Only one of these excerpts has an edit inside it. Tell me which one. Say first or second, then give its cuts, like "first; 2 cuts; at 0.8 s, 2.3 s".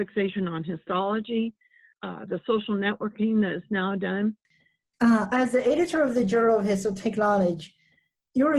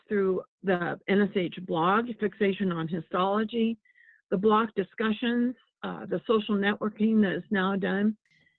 first; 1 cut; at 1.9 s